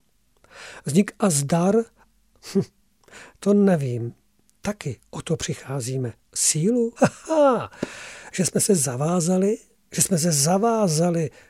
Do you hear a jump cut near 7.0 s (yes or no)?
yes